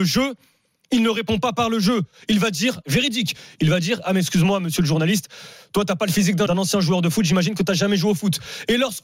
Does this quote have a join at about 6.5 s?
yes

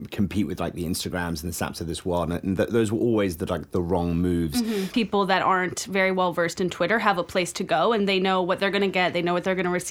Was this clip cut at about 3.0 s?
no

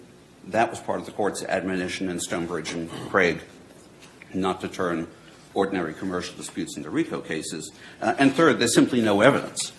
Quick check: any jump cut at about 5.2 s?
no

